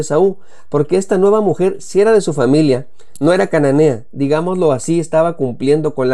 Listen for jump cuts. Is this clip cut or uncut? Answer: uncut